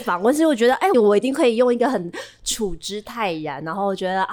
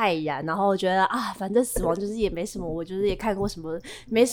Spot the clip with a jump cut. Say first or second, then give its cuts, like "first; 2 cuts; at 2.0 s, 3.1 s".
first; 1 cut; at 0.9 s